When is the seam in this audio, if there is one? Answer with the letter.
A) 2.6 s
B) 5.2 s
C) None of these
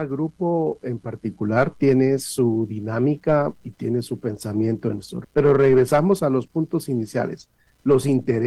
B